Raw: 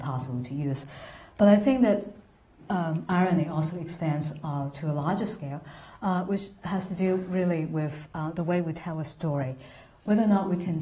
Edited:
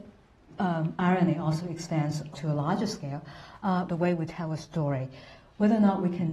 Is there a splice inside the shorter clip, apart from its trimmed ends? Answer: yes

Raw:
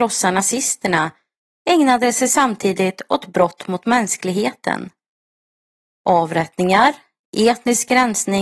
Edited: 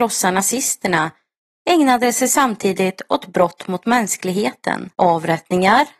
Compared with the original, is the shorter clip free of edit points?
no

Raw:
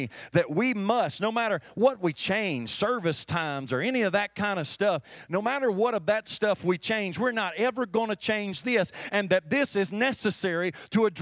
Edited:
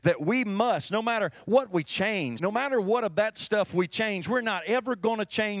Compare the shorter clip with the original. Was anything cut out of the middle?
yes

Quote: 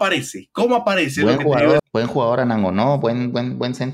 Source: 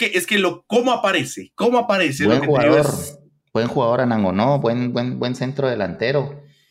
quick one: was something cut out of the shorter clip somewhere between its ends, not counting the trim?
yes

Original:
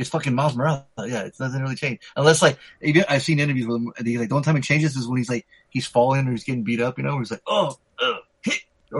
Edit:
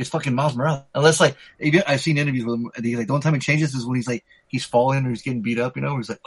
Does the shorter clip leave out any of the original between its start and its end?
yes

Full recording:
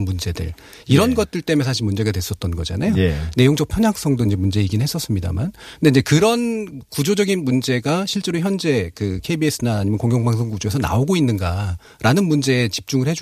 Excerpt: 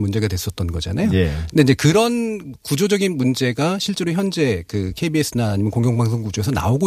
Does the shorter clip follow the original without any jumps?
no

